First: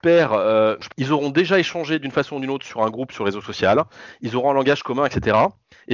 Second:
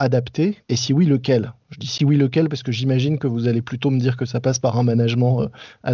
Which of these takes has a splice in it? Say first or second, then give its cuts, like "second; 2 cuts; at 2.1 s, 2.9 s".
first; 1 cut; at 0.9 s